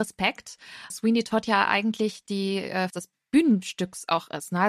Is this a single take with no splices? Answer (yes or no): no